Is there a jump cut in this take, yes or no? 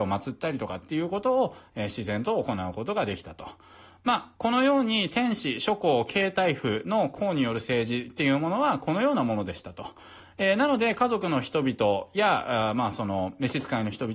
yes